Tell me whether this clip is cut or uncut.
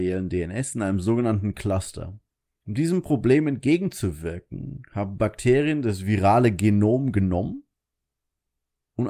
cut